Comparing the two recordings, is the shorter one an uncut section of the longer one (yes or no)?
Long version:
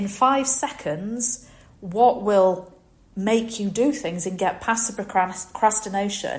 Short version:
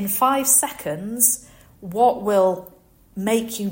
yes